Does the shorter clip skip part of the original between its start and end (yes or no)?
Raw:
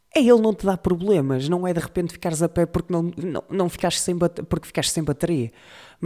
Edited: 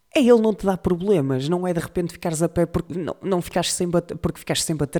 yes